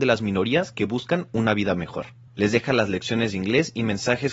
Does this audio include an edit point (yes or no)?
yes